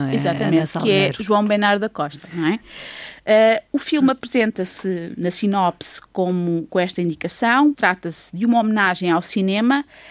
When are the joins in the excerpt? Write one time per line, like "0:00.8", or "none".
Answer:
0:07.7